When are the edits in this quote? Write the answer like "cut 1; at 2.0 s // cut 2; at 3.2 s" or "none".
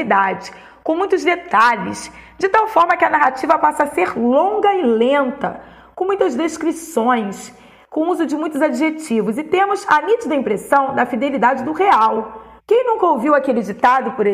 cut 1; at 12.6 s